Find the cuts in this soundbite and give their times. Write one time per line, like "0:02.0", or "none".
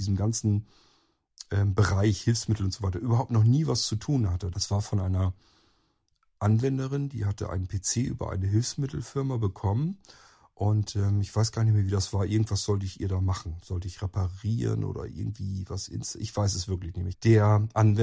0:04.5
0:17.1